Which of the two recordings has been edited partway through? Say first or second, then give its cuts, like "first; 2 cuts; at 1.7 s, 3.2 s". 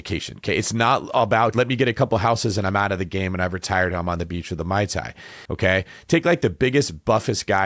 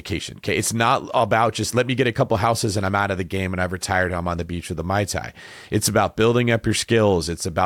first; 2 cuts; at 1.5 s, 5.5 s